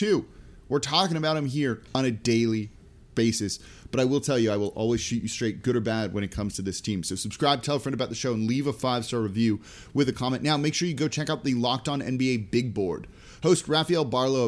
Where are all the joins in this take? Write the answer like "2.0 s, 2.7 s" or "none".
none

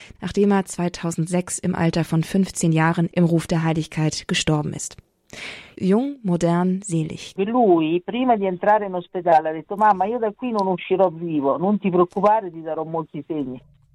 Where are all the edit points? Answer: 7.4 s

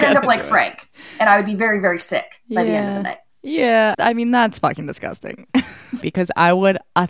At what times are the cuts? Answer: 3.9 s, 6.0 s

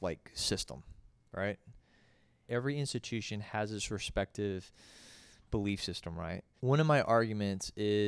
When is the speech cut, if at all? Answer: 2.5 s, 6.6 s

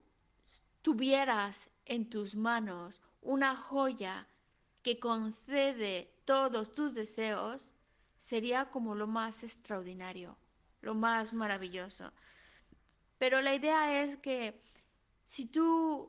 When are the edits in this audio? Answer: 13.1 s

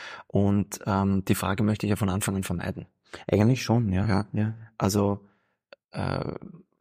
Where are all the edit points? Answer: none

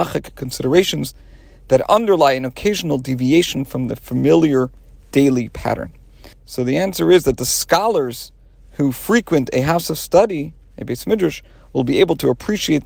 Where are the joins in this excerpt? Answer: 6.3 s

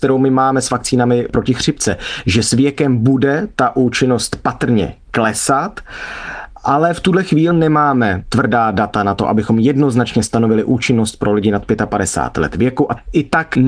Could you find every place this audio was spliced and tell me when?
7.5 s

